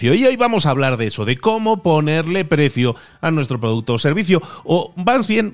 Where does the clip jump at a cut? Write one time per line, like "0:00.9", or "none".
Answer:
none